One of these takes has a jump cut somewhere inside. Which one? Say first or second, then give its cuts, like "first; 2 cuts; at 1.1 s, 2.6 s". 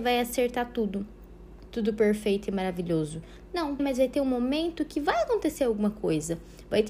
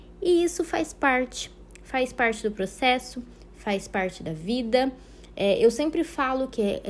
first; 2 cuts; at 1.7 s, 3.8 s